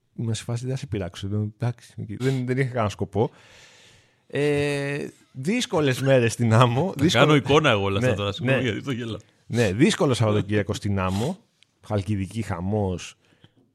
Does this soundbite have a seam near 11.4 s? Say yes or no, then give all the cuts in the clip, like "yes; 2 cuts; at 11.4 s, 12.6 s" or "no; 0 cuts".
no; 1 cut; at 2.2 s